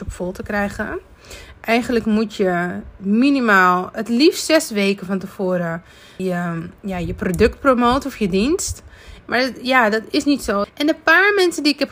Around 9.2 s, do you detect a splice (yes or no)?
yes